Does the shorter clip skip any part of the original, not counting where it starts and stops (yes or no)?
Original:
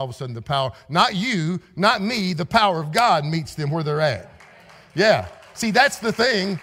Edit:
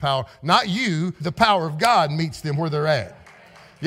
yes